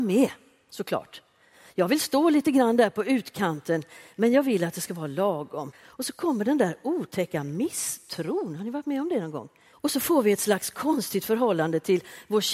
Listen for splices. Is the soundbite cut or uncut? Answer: cut